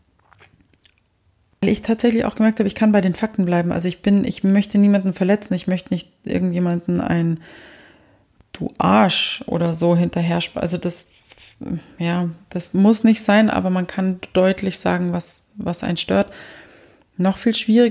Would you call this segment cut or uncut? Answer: uncut